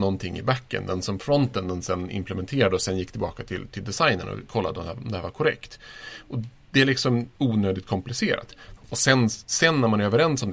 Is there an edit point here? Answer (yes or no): yes